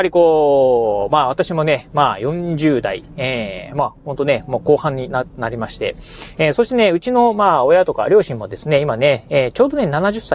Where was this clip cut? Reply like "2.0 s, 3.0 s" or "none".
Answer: none